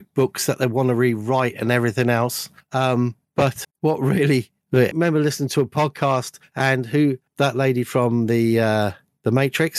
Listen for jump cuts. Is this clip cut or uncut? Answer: cut